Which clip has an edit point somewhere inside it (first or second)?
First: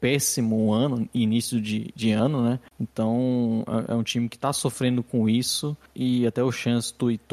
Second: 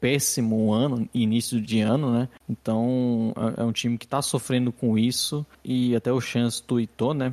second